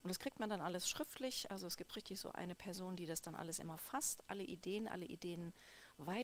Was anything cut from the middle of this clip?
no; 0 cuts

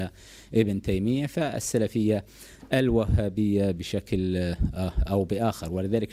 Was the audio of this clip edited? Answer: no; 0 cuts

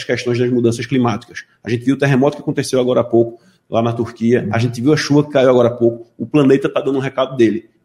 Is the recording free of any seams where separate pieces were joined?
yes; 0 cuts

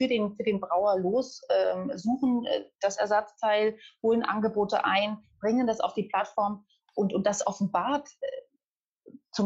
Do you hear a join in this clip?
no; 0 cuts

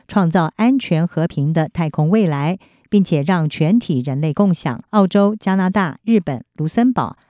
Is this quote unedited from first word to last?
no; 2 cuts; at 4.9 s, 6.0 s

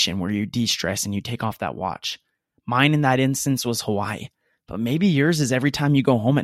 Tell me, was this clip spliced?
no; 0 cuts

